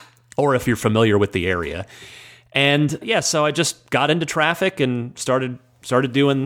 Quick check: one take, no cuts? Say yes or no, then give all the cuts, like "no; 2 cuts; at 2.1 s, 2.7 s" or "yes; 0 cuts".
no; 1 cut; at 3.0 s